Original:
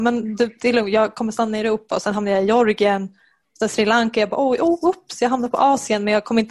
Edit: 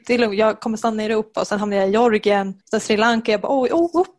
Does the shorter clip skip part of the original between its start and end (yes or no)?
yes